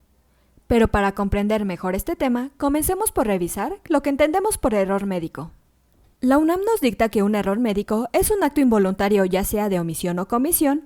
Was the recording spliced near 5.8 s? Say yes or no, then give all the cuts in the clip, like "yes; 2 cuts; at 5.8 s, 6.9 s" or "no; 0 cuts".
no; 0 cuts